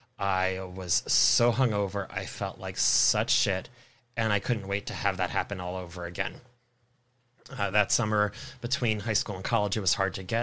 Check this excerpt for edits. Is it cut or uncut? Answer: uncut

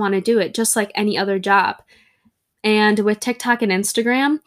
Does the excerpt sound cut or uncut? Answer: cut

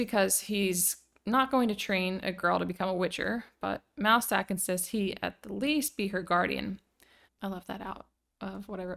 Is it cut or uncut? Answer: cut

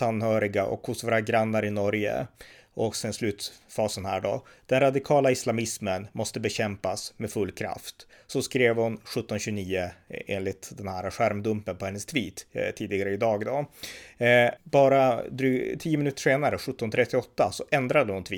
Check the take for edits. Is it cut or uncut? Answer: cut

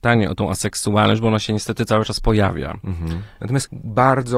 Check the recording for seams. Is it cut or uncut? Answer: cut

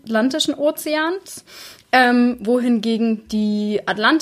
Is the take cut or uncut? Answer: uncut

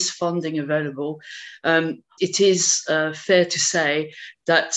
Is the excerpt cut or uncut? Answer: cut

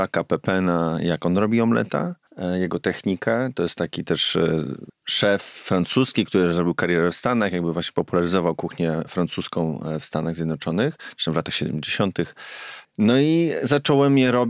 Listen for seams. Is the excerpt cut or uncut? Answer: uncut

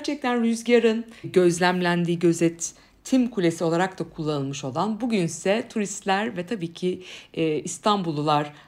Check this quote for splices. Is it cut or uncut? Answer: cut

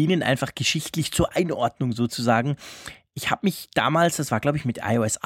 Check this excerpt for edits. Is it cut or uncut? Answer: uncut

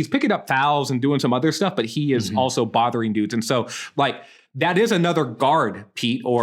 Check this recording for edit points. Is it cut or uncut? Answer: uncut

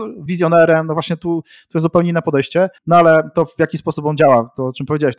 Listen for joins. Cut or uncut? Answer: cut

